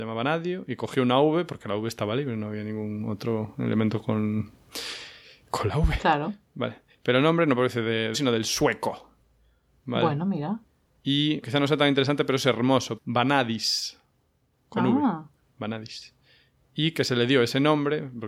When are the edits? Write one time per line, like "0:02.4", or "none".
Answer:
0:08.1
0:11.4
0:13.0